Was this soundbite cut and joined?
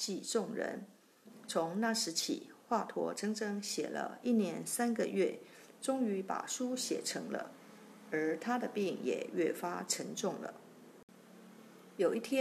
no; 0 cuts

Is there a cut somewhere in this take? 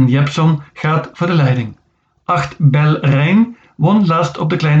no; 0 cuts

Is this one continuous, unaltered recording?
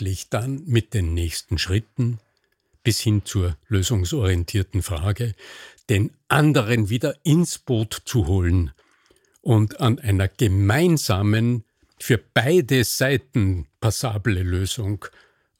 yes; 0 cuts

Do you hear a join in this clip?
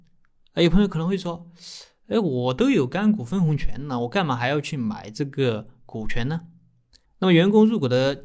yes; 1 cut; at 7.0 s

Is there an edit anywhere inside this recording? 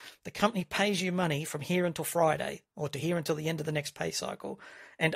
no; 0 cuts

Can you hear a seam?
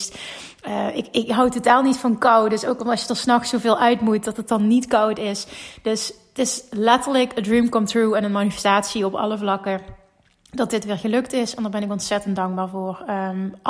no; 0 cuts

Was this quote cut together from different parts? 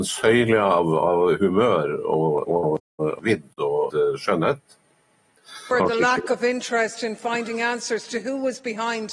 yes; 2 cuts; at 3.9 s, 5.7 s

